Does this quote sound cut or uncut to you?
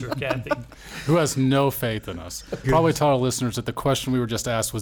cut